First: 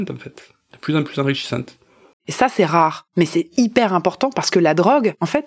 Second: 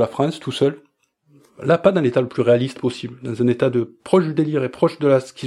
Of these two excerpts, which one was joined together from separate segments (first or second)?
first